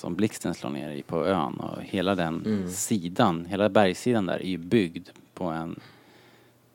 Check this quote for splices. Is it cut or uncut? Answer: uncut